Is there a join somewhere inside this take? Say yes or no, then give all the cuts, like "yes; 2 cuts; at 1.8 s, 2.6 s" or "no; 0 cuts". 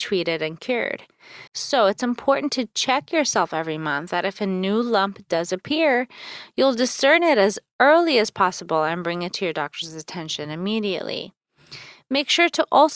yes; 2 cuts; at 1.5 s, 4.1 s